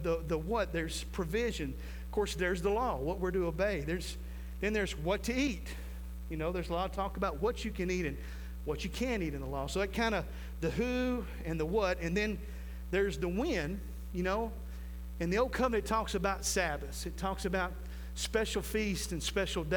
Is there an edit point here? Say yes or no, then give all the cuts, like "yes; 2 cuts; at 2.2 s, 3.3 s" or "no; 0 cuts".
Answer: no; 0 cuts